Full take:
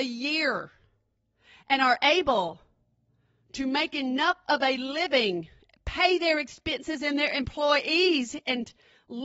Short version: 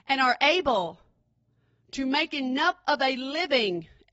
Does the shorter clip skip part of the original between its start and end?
no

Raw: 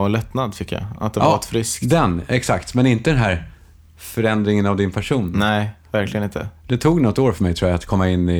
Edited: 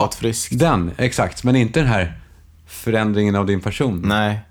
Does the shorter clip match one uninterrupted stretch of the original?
yes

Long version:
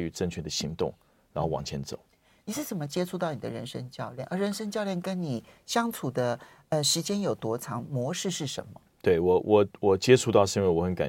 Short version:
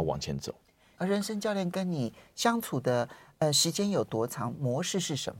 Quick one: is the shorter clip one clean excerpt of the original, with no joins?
no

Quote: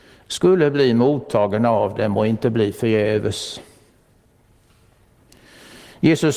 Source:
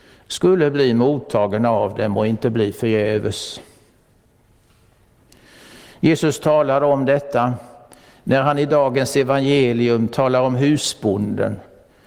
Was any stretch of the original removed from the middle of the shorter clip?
no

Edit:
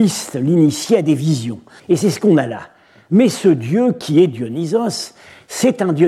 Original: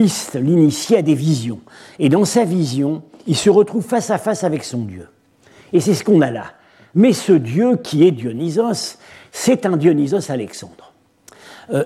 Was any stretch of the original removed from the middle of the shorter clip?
yes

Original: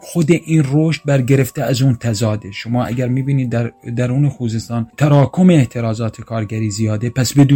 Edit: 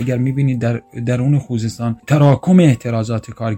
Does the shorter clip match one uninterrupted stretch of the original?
yes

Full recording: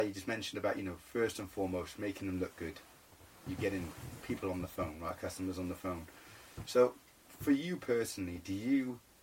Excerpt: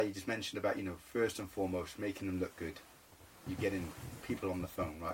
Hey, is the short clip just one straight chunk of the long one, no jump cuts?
yes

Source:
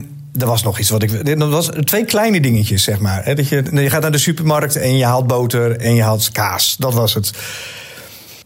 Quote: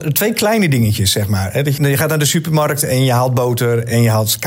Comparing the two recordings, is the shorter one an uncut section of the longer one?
no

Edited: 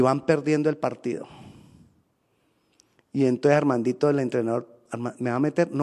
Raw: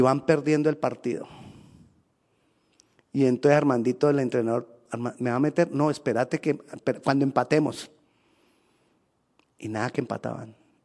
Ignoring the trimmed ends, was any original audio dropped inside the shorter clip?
no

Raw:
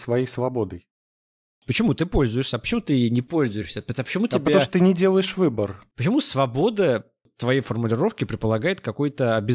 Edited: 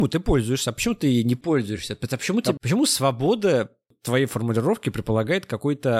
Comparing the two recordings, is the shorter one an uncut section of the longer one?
no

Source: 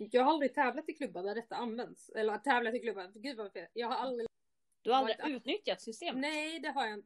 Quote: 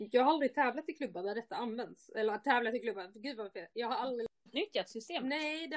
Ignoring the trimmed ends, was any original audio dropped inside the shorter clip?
yes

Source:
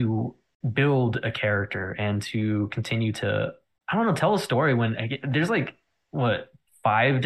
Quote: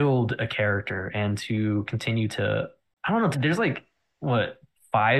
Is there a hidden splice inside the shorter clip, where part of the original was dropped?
yes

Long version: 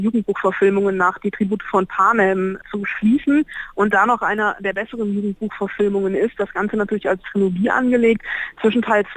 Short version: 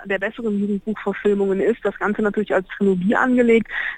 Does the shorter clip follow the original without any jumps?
yes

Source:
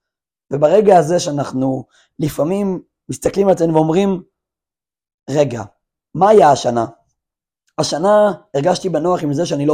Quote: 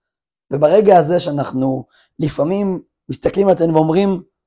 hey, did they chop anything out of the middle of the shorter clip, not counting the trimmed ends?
no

